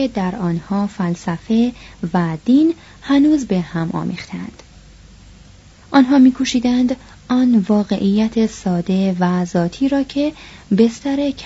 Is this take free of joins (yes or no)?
yes